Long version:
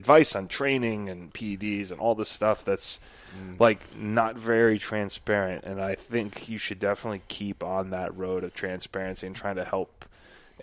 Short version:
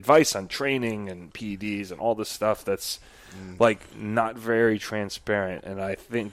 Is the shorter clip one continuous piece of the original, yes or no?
yes